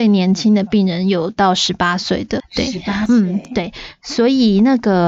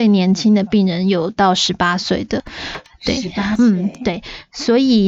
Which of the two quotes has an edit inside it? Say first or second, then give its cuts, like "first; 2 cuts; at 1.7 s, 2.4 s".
first; 1 cut; at 2.4 s